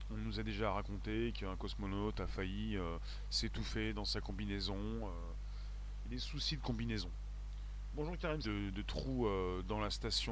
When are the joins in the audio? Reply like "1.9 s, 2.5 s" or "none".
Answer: 8.4 s